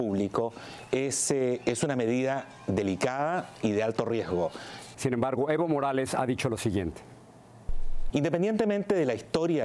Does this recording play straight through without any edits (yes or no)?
no